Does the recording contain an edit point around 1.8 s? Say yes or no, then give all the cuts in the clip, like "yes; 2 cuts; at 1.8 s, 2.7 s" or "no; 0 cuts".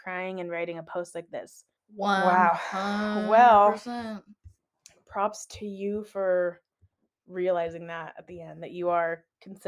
yes; 1 cut; at 1.8 s